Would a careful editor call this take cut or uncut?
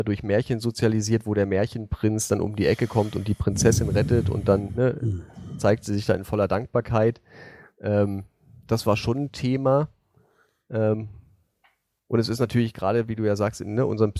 uncut